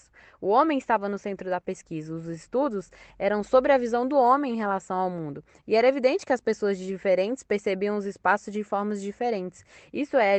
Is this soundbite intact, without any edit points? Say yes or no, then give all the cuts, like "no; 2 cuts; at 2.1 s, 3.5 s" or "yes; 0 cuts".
yes; 0 cuts